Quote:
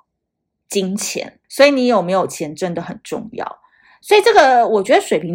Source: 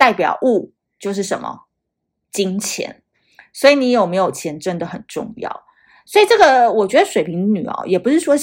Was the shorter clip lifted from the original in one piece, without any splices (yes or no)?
no